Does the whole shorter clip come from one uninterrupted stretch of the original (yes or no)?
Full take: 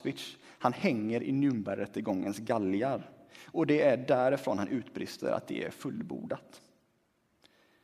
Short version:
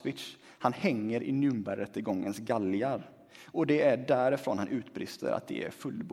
yes